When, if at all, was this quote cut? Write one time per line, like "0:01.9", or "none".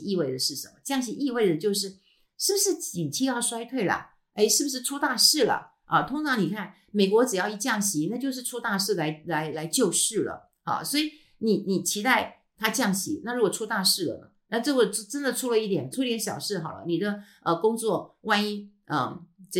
0:09.5
0:15.9